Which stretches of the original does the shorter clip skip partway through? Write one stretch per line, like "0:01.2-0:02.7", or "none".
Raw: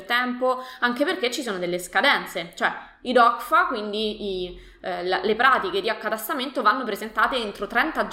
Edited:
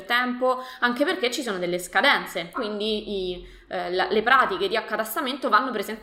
0:02.5-0:03.7